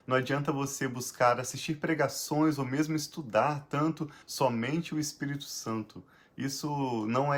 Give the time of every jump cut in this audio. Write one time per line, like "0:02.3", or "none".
0:04.2